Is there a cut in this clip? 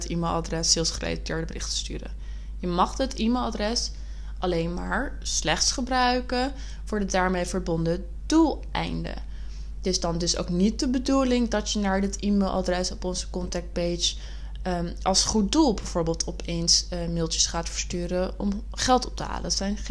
no; 0 cuts

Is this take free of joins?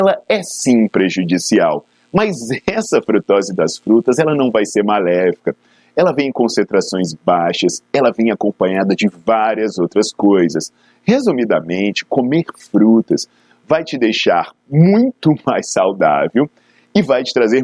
yes; 0 cuts

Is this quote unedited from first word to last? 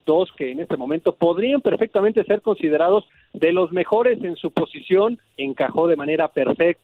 no; 1 cut; at 5.3 s

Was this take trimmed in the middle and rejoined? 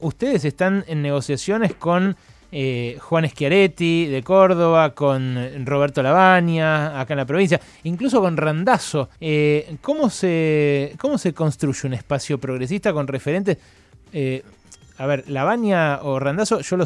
yes; 1 cut; at 9.2 s

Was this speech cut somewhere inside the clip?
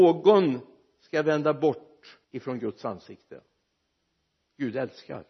yes; 1 cut; at 2.2 s

